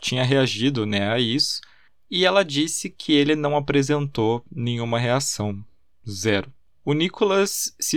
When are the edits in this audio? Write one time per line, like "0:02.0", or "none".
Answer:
none